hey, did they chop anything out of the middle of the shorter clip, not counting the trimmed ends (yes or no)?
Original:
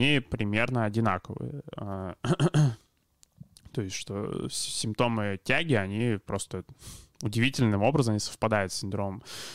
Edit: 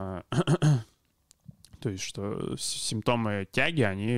no